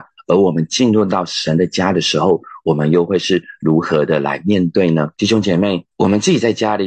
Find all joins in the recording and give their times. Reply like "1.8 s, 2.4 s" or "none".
5.1 s